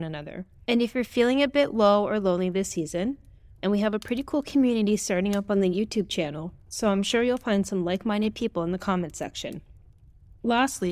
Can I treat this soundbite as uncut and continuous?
no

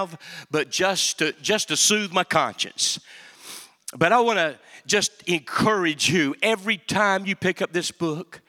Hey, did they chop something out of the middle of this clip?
no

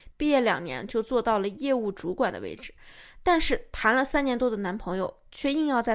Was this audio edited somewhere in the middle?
no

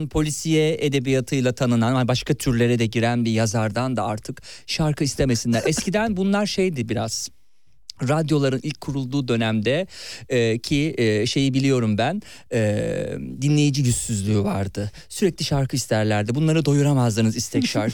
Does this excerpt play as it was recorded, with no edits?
yes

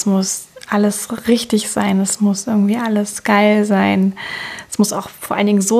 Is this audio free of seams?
yes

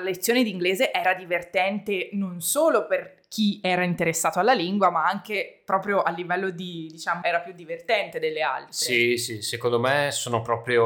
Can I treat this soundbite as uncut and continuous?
no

